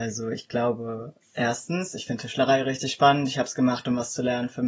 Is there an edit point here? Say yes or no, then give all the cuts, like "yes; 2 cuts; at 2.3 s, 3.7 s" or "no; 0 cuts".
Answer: no; 0 cuts